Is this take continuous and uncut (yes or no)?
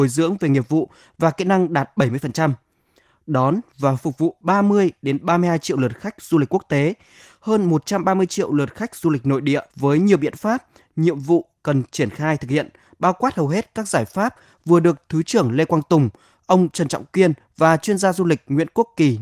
no